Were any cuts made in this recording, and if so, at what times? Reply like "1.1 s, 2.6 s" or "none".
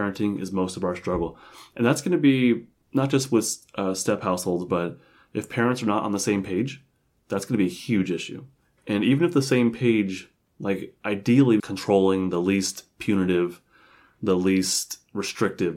11.6 s